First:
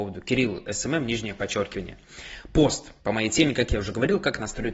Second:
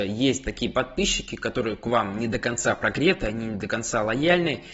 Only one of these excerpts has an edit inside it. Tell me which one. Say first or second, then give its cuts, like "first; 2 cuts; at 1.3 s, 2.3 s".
first; 1 cut; at 3.0 s